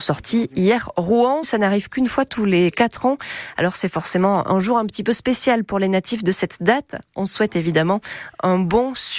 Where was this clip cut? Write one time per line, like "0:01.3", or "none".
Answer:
0:01.4